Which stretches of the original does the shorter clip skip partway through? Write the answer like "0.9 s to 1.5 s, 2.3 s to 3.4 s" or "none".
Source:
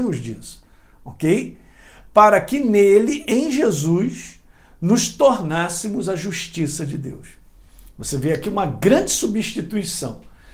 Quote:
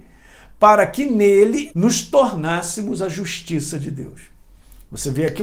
3.2 s to 4.8 s